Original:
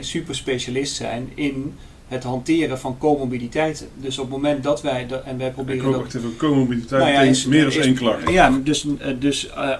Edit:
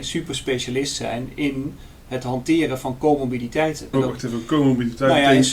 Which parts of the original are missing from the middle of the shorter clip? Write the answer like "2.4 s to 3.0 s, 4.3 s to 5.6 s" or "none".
3.9 s to 5.8 s